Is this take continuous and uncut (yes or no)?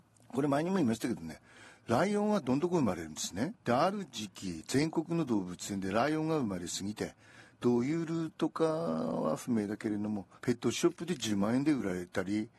no